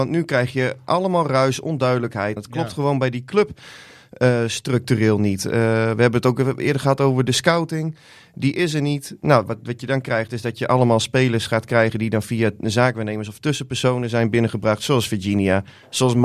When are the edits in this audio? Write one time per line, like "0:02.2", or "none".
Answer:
0:02.4